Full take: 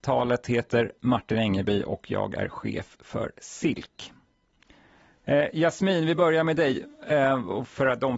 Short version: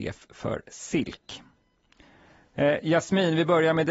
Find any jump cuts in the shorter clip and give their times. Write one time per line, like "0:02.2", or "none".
none

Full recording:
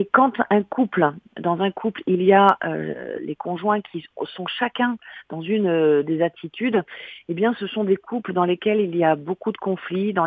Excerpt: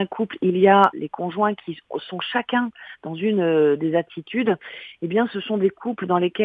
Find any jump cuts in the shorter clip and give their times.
0:00.9

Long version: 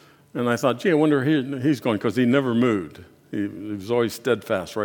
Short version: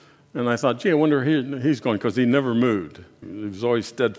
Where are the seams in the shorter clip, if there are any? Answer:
0:03.2

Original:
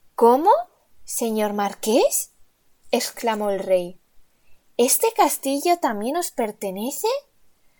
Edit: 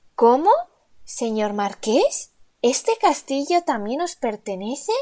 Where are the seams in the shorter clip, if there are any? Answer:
0:02.6

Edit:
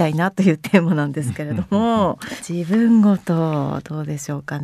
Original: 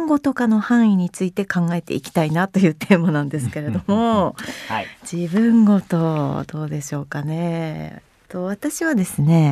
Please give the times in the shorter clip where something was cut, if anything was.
0:02.4

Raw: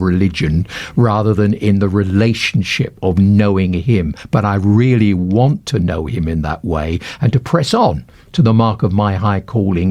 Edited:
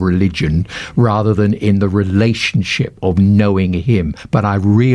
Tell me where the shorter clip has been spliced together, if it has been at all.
none

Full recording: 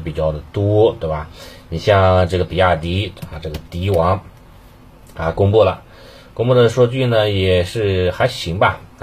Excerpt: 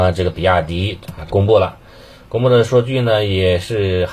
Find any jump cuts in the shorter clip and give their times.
0:01.3

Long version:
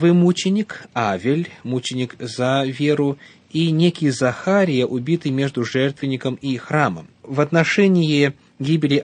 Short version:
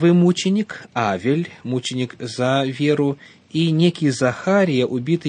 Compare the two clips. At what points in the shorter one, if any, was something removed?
none

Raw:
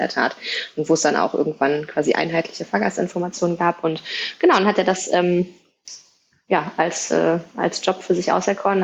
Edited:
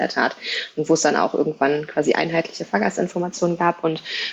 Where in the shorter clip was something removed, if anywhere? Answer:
none

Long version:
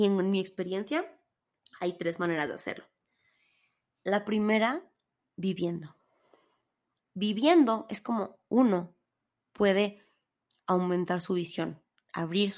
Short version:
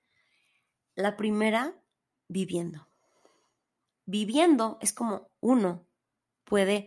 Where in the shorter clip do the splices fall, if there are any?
none

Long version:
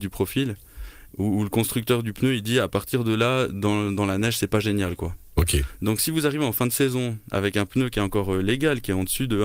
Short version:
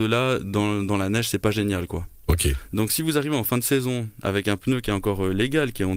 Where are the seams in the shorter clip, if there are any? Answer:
none

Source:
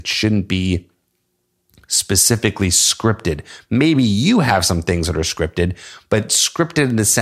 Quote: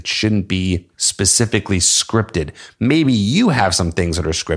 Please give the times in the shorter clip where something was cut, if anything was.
0:00.9

